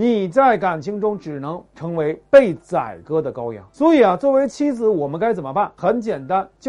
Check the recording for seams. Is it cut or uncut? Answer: uncut